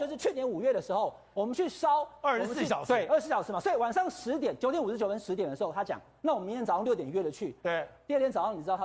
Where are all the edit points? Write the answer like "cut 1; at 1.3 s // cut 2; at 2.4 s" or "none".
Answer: cut 1; at 1.3 s